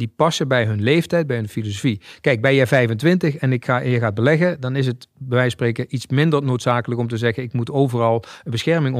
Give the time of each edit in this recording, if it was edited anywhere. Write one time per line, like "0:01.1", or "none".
none

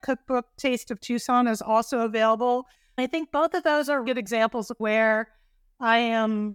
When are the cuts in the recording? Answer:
0:04.0

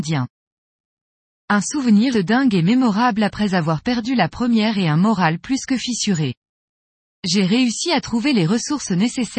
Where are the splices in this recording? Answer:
0:02.1

